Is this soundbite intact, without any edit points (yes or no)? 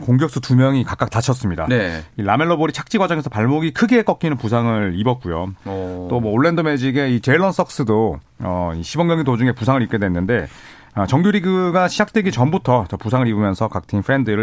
no